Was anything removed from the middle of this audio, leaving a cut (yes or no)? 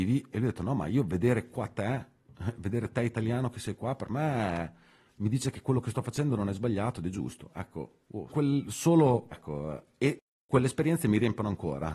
yes